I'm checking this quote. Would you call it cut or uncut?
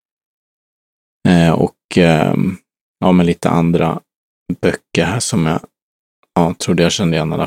uncut